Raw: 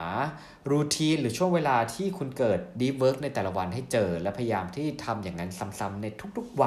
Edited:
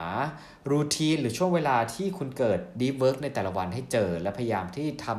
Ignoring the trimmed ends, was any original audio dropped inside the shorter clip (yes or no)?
no